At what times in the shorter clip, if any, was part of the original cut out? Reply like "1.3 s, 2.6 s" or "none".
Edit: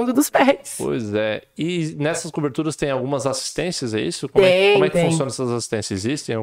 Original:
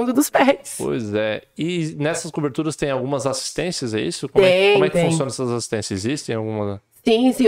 none

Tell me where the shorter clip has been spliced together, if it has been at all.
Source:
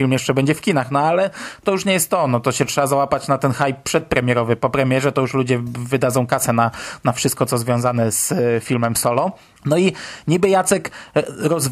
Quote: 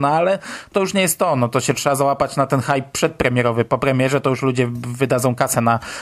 none

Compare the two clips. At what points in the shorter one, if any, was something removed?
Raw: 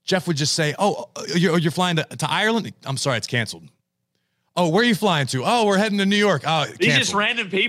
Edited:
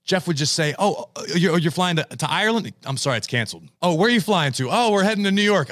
3.7 s

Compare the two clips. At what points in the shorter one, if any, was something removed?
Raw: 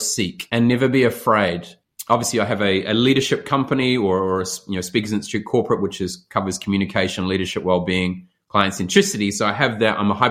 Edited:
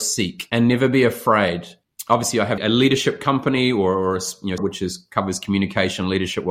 2.6 s, 4.6 s

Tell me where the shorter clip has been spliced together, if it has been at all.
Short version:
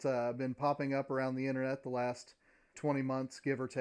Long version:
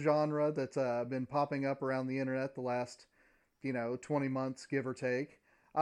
2.7 s

